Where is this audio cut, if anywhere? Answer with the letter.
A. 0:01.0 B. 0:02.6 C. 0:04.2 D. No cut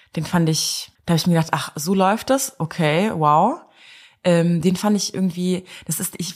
A